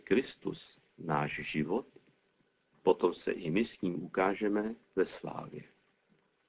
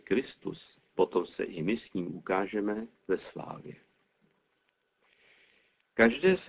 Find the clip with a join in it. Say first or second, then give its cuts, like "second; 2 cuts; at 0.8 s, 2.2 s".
second; 1 cut; at 0.9 s